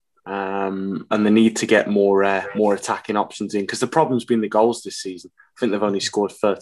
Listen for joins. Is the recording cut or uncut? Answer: uncut